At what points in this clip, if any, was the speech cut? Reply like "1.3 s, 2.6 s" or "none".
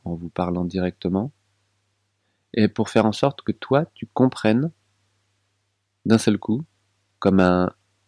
none